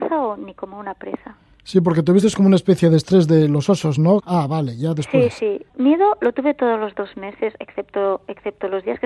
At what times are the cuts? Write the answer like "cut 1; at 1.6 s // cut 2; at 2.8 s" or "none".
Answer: cut 1; at 4.2 s // cut 2; at 5.7 s